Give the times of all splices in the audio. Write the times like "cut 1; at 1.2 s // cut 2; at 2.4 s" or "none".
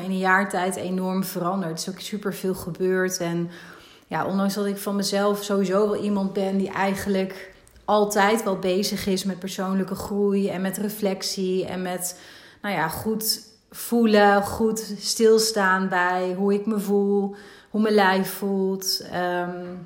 none